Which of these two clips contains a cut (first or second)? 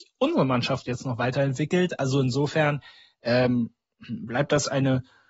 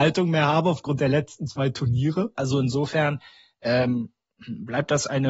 second